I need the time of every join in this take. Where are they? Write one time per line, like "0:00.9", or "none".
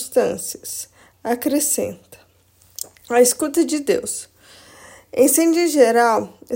0:01.1